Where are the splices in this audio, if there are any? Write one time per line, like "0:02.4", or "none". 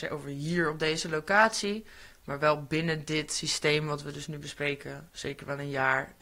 none